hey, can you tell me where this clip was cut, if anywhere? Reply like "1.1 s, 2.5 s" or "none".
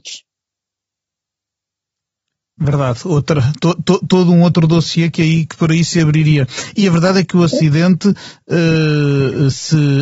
none

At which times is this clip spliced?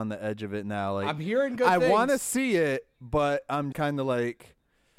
3.7 s

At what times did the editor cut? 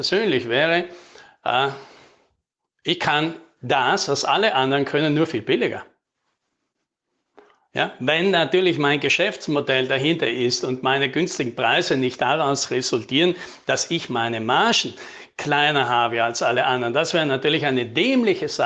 none

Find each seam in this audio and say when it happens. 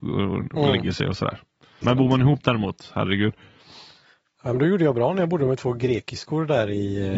1.8 s

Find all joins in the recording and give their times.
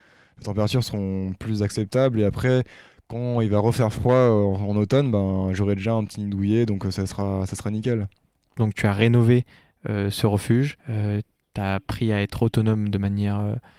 8.6 s, 10.8 s

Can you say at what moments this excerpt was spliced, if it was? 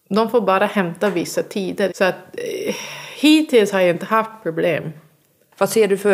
1.9 s

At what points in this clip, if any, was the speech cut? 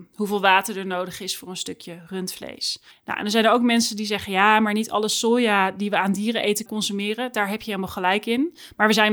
2.9 s, 6.7 s

